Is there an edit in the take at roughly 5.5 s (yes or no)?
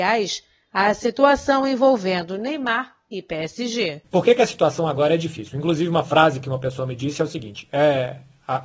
no